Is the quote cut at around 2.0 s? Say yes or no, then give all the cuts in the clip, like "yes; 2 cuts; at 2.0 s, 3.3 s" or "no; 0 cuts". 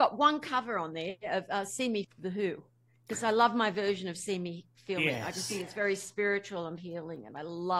yes; 2 cuts; at 2.0 s, 6.8 s